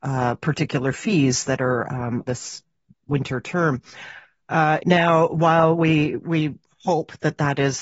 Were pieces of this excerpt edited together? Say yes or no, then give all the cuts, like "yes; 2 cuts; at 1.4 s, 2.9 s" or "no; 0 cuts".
yes; 2 cuts; at 2.2 s, 4.8 s